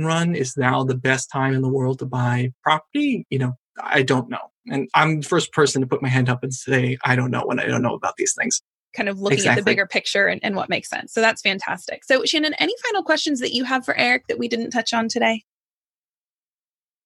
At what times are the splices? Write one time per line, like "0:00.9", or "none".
0:08.9